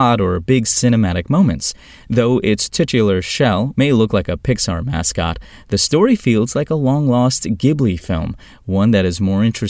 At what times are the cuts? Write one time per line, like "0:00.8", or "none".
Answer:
0:03.7